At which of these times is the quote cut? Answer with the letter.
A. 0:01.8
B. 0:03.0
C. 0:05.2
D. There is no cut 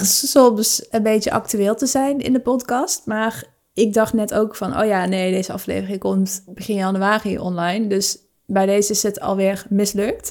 D